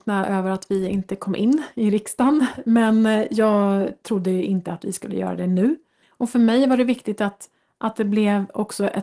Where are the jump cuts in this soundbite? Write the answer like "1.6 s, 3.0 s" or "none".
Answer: 6.0 s